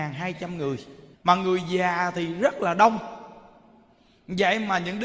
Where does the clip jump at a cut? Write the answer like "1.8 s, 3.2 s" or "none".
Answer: 1.1 s